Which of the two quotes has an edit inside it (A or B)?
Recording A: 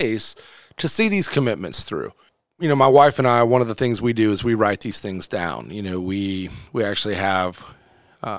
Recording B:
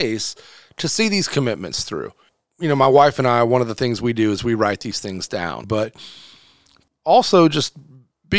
B